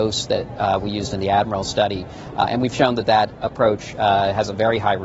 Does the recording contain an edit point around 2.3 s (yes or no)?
no